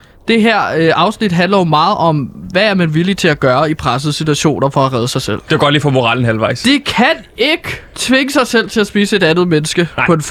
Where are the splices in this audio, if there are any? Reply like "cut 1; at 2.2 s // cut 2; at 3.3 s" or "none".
cut 1; at 5.5 s // cut 2; at 7.9 s